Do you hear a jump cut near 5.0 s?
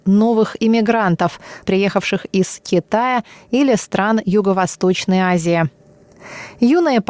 no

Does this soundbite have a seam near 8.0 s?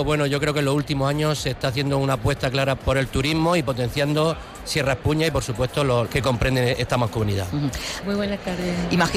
yes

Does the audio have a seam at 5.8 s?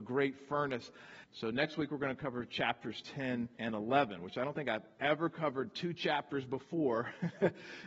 no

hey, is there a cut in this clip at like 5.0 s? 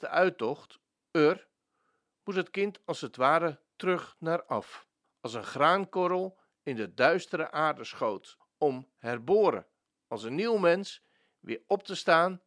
yes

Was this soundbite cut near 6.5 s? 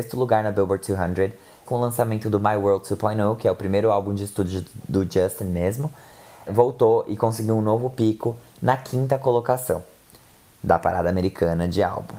yes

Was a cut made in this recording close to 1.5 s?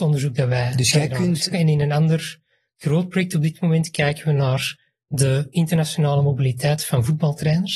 yes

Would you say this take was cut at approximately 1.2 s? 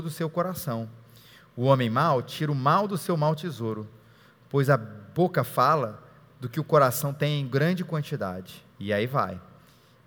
no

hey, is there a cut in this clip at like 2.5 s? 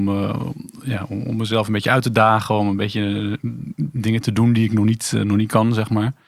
no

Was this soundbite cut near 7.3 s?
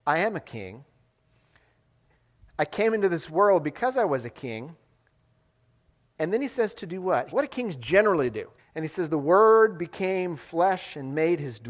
yes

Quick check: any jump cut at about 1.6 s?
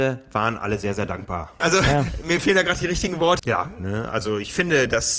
yes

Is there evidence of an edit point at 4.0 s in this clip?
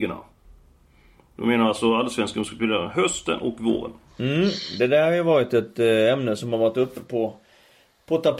no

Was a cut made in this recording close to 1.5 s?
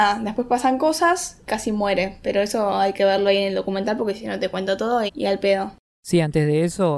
yes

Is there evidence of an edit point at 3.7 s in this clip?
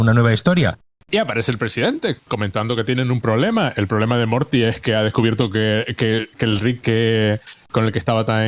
no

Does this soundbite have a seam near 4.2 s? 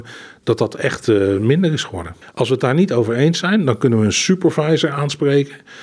no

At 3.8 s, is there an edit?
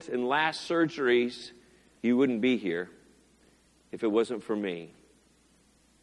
no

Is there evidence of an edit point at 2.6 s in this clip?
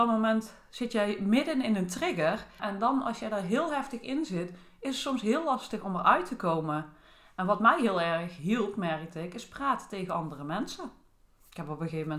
yes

